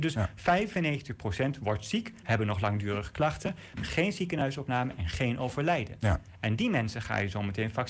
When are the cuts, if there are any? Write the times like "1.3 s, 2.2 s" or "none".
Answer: 2.2 s, 3.7 s